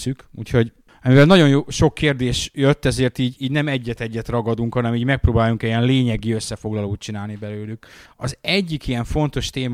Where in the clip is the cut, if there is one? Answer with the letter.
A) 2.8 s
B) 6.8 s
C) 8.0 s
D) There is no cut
C